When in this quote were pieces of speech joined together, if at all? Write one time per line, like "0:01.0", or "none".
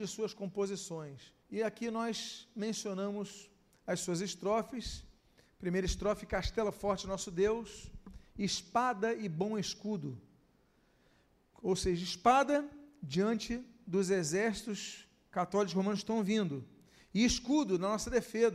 0:01.4